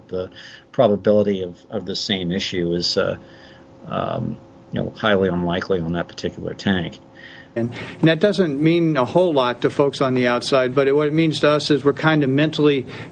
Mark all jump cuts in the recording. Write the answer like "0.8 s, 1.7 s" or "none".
7.6 s